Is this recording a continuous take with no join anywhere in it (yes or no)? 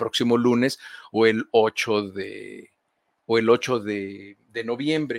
yes